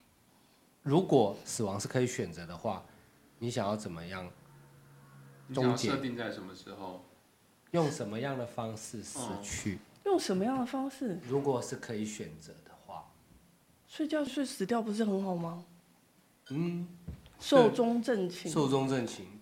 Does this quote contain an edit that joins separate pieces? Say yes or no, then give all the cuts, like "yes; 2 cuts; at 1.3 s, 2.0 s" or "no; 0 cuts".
yes; 1 cut; at 14.3 s